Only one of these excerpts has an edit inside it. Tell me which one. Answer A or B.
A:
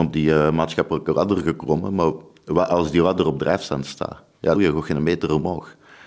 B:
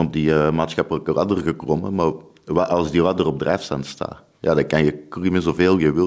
A